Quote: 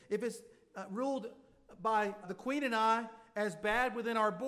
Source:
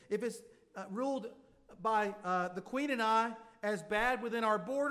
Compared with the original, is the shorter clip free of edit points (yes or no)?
no